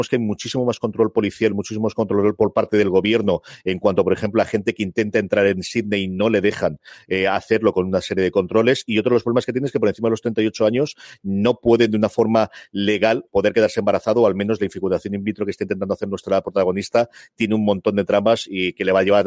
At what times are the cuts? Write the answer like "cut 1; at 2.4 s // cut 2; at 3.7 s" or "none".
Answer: cut 1; at 13.3 s